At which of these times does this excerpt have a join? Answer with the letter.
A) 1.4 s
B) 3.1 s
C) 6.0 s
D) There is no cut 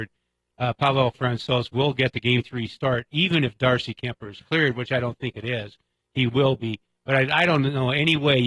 D